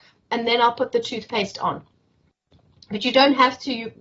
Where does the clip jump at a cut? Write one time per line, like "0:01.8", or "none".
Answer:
none